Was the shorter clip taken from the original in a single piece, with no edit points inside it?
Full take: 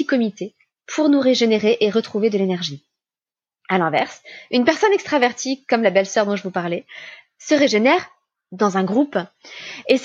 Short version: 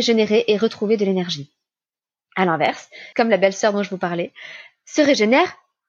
no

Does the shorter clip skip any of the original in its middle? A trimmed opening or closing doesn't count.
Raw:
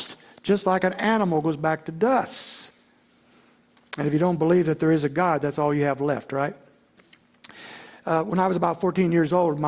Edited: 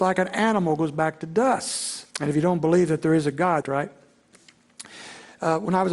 yes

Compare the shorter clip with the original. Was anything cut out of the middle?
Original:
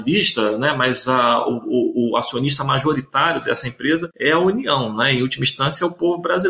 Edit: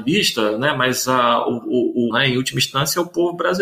yes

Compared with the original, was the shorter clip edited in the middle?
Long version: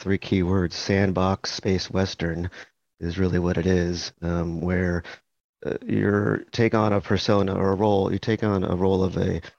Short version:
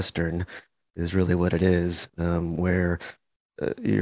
no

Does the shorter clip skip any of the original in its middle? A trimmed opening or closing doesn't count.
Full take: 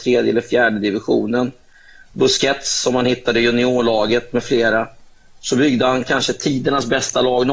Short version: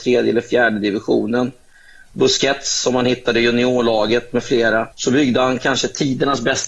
yes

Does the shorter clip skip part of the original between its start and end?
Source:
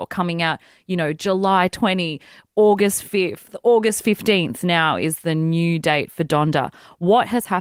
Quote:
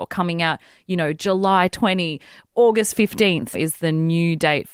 yes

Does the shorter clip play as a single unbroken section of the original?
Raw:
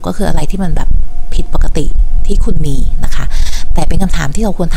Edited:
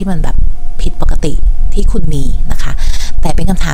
yes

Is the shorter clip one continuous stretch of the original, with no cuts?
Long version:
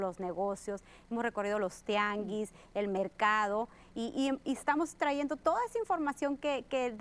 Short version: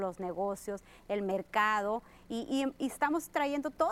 no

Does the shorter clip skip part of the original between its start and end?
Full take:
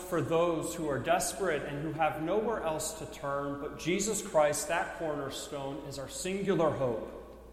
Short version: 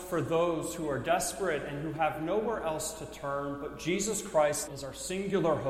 yes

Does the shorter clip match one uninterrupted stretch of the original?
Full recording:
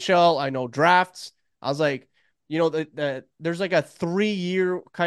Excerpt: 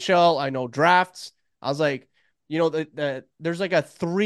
yes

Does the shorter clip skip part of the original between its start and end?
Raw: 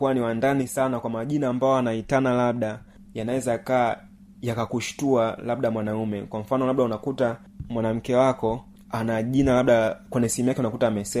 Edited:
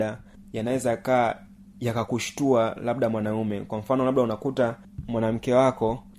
no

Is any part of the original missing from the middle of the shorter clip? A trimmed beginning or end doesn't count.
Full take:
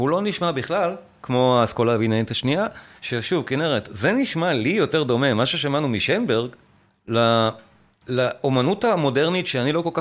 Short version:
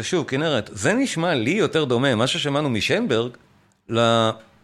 no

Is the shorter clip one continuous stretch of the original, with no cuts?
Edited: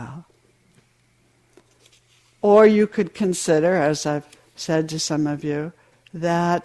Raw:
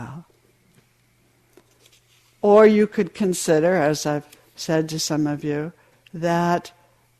yes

